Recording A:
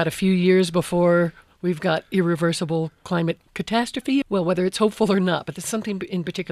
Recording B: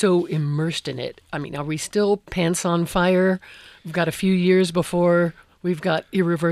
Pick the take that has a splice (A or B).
A